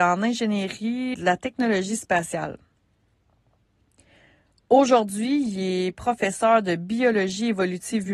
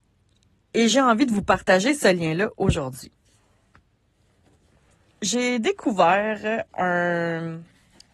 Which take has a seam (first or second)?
first